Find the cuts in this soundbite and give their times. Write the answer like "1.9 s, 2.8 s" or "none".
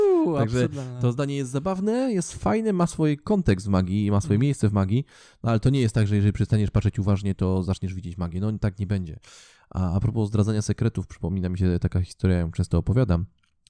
none